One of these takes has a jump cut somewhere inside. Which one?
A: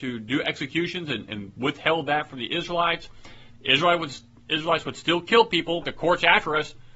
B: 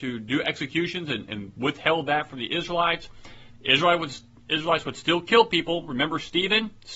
A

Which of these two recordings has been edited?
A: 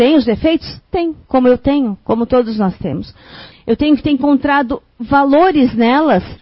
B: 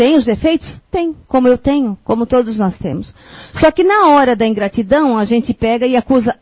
A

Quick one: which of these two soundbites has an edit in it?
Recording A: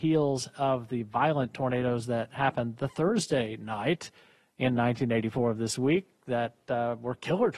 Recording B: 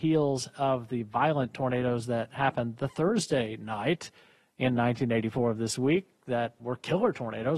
B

